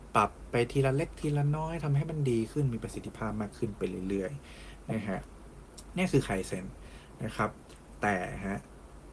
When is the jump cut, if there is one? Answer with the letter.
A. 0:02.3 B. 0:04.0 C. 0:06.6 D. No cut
D